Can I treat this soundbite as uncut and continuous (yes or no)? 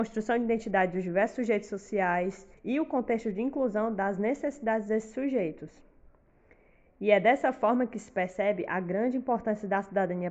no